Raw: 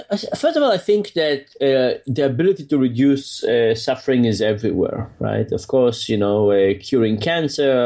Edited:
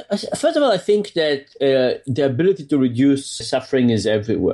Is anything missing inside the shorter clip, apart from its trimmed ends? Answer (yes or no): yes